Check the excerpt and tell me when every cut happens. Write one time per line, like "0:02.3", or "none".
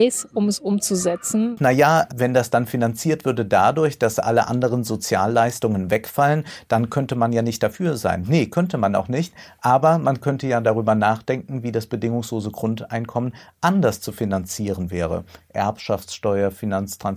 0:02.1